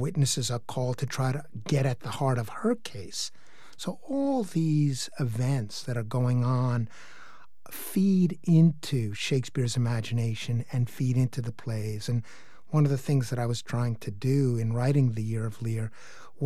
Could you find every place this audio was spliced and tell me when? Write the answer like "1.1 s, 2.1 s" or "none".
none